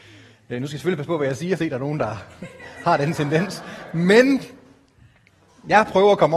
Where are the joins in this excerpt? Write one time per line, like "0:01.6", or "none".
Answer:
0:01.6

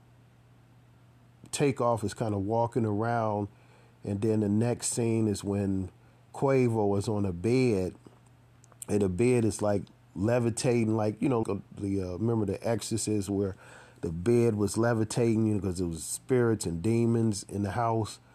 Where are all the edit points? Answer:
0:11.4

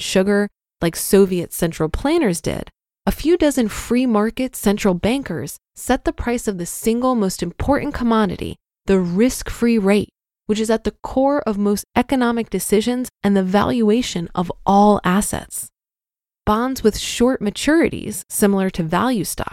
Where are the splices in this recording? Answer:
0:16.3

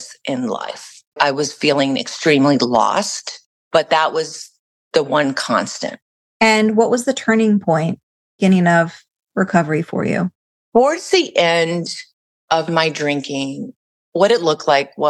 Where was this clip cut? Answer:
none

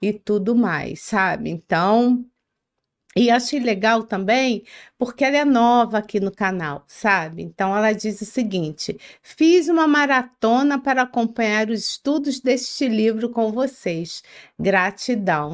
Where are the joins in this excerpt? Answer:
none

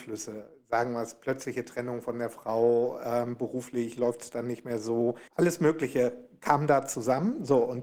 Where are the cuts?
none

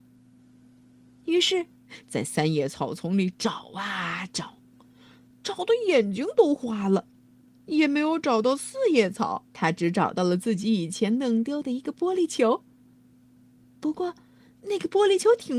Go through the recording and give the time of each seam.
0:02.0
0:09.5

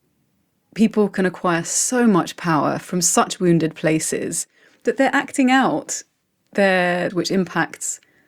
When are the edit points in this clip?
0:07.1

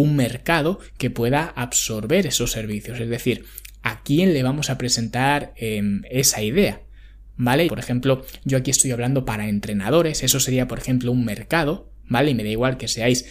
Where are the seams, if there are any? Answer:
0:07.7

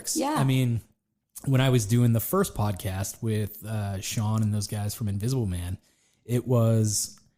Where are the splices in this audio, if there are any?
none

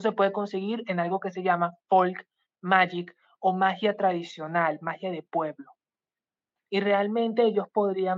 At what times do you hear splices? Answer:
0:06.7

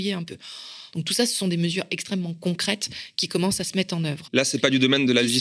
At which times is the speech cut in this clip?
0:00.9
0:04.3

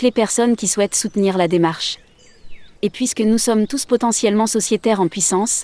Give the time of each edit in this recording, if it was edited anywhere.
0:02.8

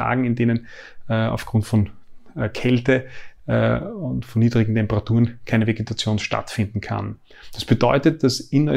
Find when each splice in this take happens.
none

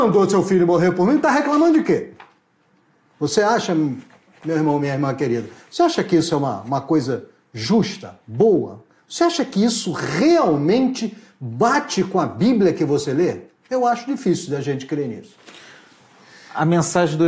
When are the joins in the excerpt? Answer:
none

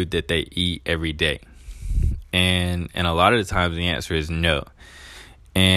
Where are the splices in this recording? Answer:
none

